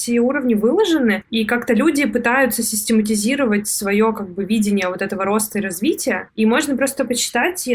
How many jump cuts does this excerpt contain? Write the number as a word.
zero